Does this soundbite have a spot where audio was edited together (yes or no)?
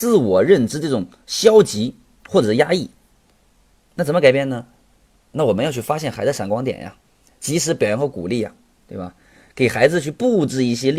no